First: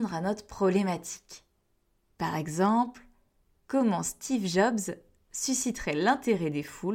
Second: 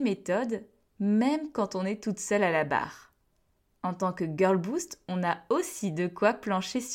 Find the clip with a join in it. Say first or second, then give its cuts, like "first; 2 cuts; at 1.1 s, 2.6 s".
first; 1 cut; at 2.1 s